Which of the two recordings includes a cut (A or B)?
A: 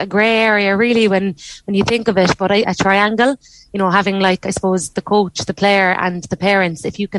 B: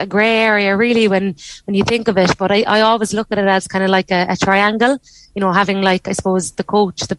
A